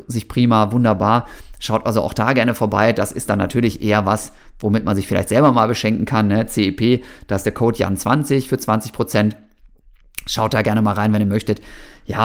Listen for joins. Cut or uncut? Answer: uncut